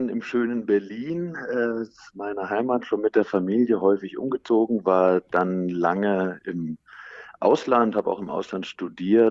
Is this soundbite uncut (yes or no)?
yes